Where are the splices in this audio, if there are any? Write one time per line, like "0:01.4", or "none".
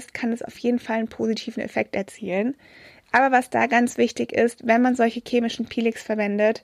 none

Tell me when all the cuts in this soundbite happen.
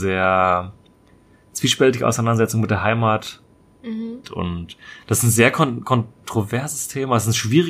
0:04.2

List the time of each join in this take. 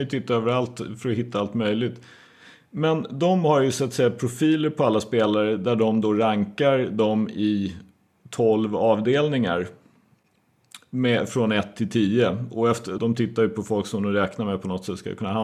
0:13.0

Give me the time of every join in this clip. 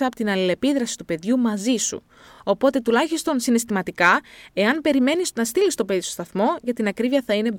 none

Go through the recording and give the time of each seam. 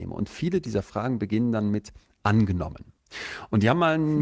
none

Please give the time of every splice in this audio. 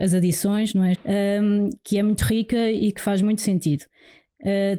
0:00.9

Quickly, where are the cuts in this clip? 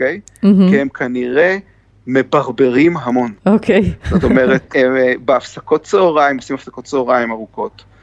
0:03.4

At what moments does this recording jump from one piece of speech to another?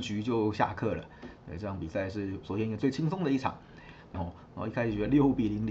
0:04.1

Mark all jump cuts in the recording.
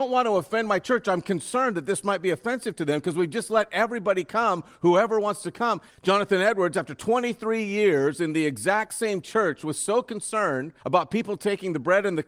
0:05.9
0:10.8

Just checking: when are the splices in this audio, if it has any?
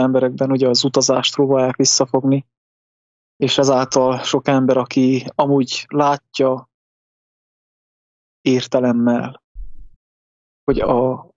none

